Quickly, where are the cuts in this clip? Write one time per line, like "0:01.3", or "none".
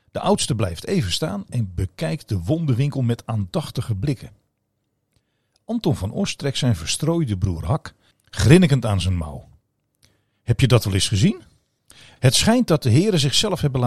0:08.1
0:12.2